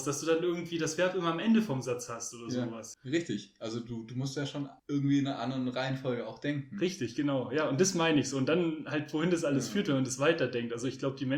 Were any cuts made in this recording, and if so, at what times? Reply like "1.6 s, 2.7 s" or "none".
2.9 s, 4.8 s